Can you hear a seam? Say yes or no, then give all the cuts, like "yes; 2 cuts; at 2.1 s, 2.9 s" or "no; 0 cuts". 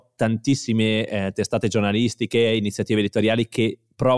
no; 0 cuts